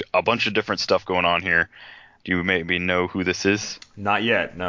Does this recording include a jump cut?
yes; 1 cut; at 2.2 s

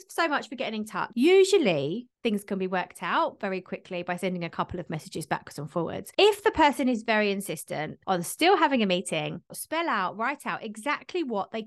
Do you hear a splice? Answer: yes; 2 cuts; at 1.1 s, 9.5 s

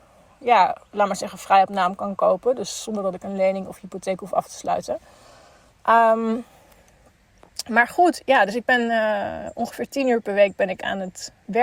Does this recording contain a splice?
no; 0 cuts

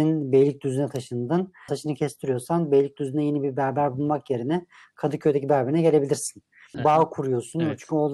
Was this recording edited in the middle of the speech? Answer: yes; 2 cuts; at 1.7 s, 6.7 s

